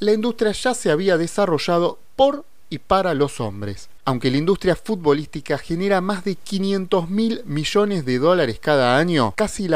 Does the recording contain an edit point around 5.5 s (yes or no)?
no